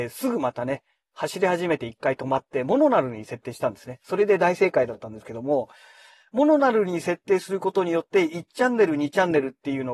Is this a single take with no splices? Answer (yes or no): yes